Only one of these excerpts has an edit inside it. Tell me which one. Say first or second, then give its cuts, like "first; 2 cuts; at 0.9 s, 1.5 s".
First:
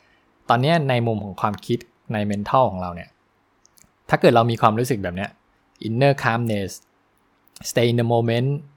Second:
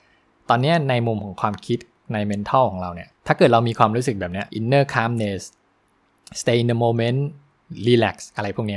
second; 2 cuts; at 3.2 s, 4.5 s